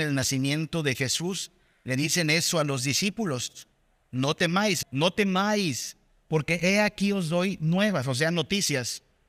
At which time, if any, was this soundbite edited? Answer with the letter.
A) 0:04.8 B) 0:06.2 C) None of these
A